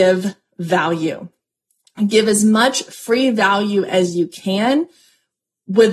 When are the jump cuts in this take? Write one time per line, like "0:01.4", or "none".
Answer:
none